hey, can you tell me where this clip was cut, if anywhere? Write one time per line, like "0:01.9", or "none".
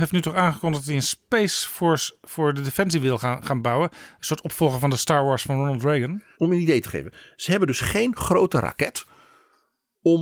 0:06.3